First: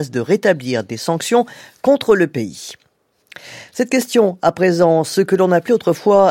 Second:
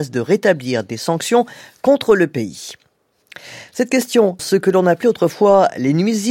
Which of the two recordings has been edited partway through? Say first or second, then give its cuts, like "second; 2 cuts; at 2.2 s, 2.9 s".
second; 1 cut; at 4.4 s